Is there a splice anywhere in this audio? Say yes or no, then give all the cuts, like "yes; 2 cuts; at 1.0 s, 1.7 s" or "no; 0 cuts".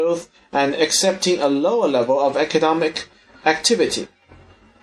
no; 0 cuts